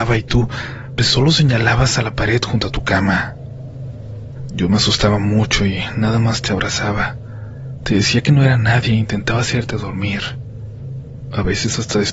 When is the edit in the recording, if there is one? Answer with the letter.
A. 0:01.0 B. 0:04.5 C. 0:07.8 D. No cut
A